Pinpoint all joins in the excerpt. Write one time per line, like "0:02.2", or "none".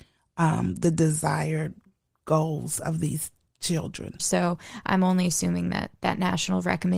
0:04.2

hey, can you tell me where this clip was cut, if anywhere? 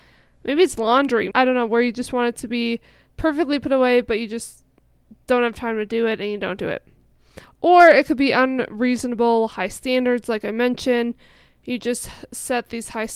0:01.3

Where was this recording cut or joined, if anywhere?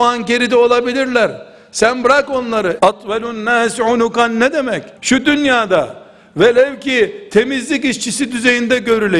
0:02.8
0:05.0

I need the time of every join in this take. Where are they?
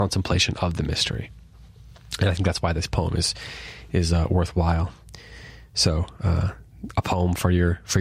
none

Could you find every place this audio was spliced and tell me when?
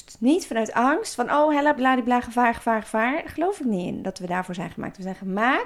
0:01.7

